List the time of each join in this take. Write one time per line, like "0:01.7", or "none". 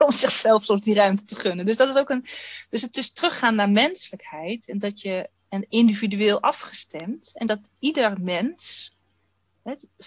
none